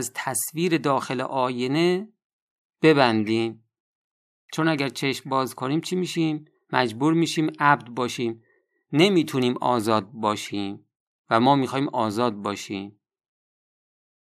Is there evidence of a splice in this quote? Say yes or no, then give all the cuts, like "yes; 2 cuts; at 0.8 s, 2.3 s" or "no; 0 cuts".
no; 0 cuts